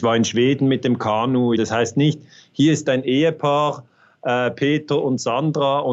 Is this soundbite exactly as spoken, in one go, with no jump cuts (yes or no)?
no